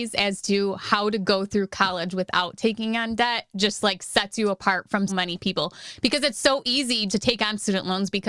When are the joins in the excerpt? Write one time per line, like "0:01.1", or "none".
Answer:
0:05.1
0:07.1